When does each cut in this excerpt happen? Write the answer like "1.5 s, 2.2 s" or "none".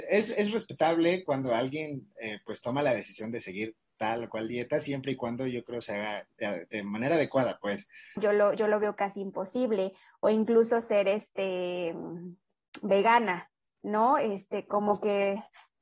8.2 s